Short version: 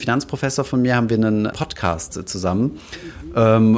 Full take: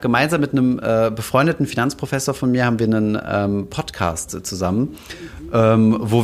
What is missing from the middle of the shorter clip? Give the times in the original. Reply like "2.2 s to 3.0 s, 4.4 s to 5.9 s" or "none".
3.2 s to 3.7 s